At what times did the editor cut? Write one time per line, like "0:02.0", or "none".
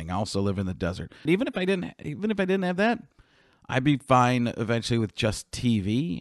0:01.3